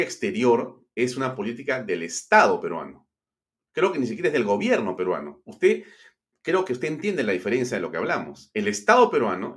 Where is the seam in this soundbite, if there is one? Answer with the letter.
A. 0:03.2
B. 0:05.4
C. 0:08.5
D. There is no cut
D